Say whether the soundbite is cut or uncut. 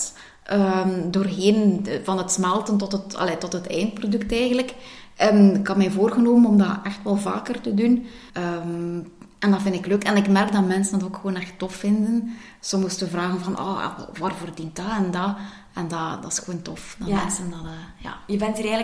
cut